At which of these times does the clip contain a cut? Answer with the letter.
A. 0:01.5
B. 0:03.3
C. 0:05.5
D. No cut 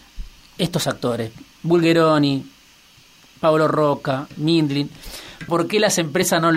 C